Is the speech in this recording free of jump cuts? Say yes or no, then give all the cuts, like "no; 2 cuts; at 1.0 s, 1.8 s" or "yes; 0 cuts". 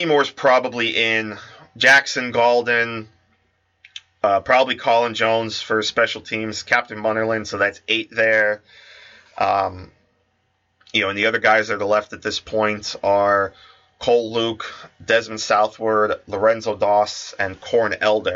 yes; 0 cuts